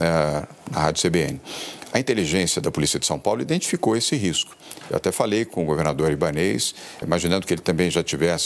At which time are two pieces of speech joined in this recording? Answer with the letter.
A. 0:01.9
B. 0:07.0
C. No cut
B